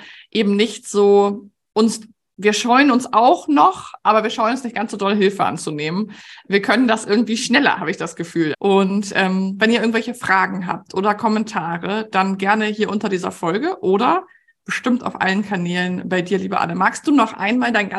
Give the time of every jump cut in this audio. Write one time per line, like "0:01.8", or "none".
0:08.5